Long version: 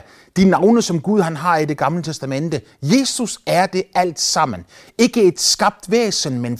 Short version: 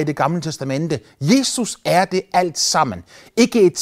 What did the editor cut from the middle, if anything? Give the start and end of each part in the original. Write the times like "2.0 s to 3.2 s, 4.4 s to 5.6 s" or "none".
none